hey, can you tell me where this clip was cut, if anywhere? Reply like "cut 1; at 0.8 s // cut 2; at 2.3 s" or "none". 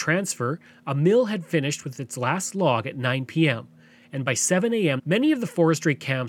cut 1; at 5.0 s